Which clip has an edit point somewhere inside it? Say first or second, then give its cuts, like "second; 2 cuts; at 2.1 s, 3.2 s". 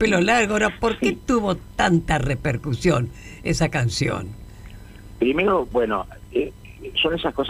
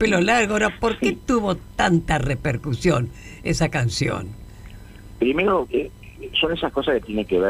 second; 1 cut; at 5.7 s